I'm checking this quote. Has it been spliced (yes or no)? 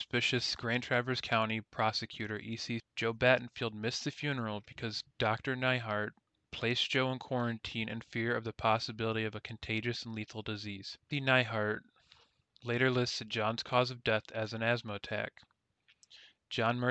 yes